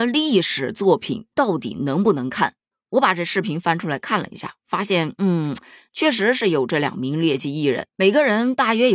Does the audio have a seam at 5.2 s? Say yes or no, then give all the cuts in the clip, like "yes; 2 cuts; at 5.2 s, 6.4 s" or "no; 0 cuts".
no; 1 cut; at 2.7 s